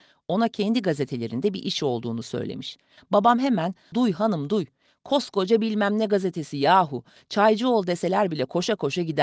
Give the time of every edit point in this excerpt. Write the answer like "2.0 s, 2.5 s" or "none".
3.9 s